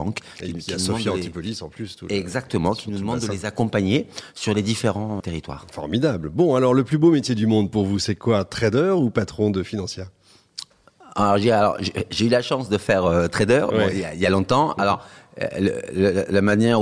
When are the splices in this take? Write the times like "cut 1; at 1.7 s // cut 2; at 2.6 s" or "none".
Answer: cut 1; at 5.2 s